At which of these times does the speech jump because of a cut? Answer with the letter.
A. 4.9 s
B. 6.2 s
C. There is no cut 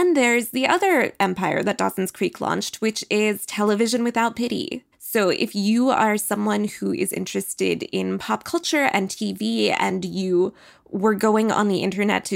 A